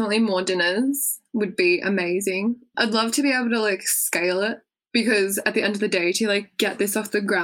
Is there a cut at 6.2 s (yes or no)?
no